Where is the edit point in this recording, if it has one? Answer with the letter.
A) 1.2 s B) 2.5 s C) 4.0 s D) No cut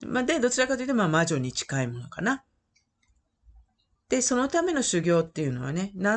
D